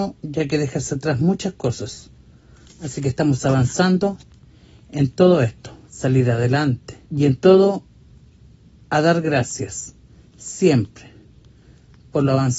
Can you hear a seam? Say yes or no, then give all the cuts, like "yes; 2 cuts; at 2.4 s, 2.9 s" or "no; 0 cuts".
yes; 2 cuts; at 5.8 s, 7.0 s